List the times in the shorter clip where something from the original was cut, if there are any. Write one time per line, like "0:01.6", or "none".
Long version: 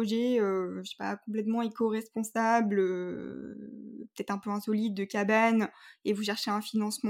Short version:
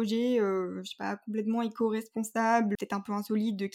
0:02.8